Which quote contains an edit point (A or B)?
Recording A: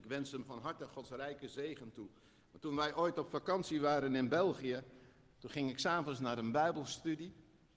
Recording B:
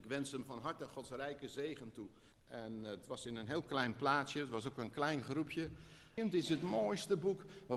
B